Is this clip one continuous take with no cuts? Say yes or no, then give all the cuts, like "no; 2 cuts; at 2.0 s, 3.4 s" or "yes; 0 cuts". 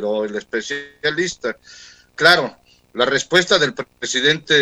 yes; 0 cuts